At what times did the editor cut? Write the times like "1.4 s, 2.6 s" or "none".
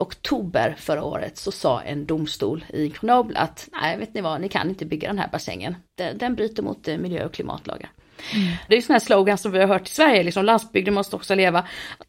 5.8 s, 8.7 s